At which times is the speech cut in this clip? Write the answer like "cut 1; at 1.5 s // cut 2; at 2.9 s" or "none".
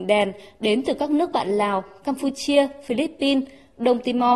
none